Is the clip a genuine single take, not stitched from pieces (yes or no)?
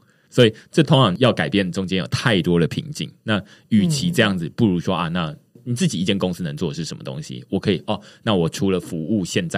yes